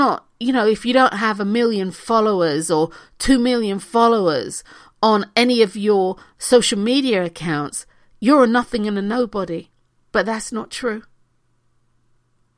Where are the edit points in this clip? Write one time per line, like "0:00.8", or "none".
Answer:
none